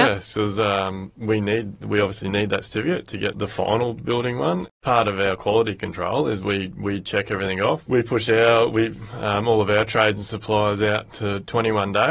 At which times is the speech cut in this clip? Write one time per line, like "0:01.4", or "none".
none